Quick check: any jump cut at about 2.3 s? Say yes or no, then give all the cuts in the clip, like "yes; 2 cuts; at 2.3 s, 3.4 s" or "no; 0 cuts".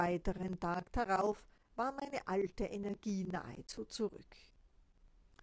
no; 0 cuts